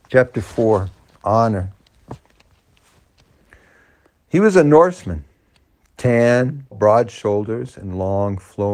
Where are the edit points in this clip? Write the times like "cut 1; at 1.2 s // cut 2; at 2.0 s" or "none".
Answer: cut 1; at 6.7 s